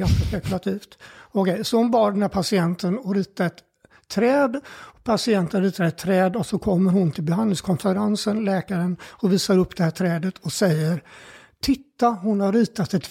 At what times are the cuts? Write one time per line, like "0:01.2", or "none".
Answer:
none